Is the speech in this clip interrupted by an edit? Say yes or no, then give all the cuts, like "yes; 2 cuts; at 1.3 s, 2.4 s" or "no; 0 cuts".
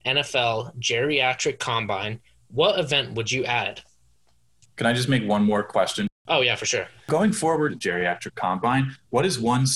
yes; 2 cuts; at 4.6 s, 7.7 s